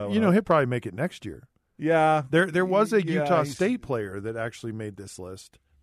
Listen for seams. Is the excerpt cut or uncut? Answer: uncut